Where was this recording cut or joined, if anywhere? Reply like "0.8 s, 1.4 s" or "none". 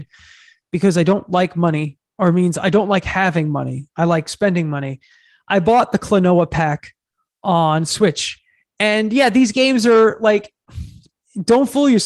none